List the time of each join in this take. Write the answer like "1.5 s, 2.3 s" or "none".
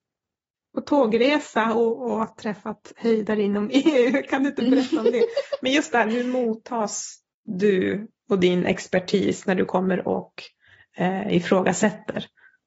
none